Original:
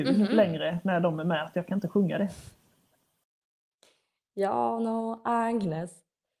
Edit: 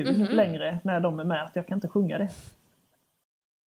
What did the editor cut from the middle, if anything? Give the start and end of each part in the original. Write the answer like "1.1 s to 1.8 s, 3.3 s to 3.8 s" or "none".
none